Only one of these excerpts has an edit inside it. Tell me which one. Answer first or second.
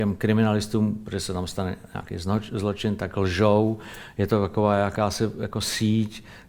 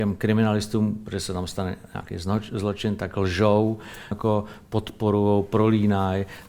second